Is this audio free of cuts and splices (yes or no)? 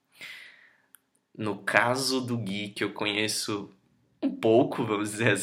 yes